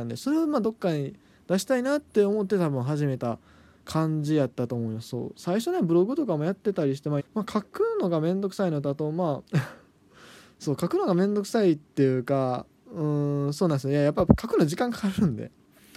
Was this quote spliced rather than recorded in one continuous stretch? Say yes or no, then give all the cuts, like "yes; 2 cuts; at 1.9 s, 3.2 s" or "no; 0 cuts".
yes; 2 cuts; at 7.2 s, 9.5 s